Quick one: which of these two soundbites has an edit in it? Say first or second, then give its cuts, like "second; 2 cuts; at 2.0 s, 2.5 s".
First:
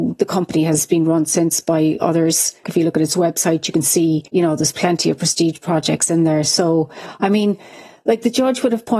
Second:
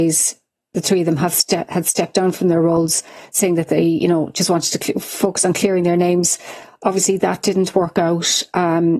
first; 2 cuts; at 2.6 s, 4.3 s